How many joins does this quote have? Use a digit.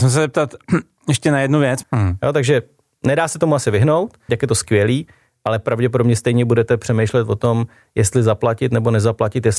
2